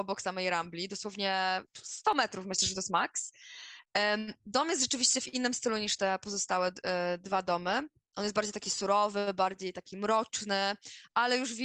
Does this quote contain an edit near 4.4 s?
no; 1 cut; at 1.7 s

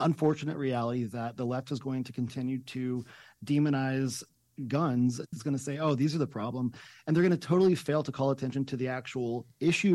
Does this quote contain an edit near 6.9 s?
no; 1 cut; at 5.3 s

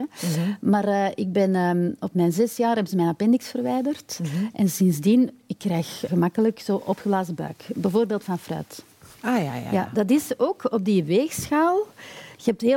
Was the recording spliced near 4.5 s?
no; 1 cut; at 6.1 s

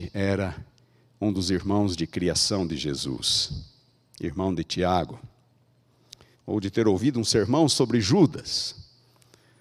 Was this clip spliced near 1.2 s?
no; 1 cut; at 6.3 s

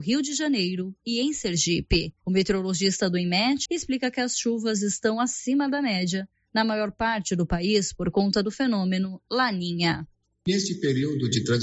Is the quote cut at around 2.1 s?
no; 1 cut; at 3.7 s

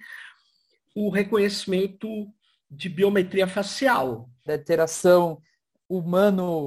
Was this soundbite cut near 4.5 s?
yes; 1 cut; at 4.5 s

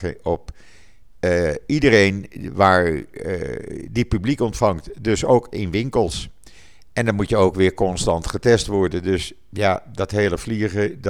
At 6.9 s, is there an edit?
yes; 1 cut; at 6.9 s

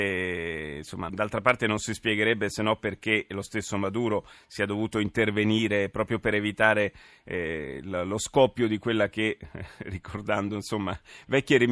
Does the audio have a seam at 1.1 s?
yes; 1 cut; at 1.1 s

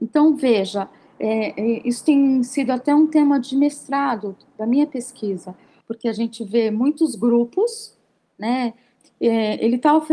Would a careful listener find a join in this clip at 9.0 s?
yes; 2 cuts; at 5.8 s, 9.0 s

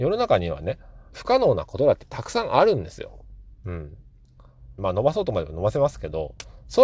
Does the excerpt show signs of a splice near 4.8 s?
yes; 2 cuts; at 1.1 s, 4.8 s

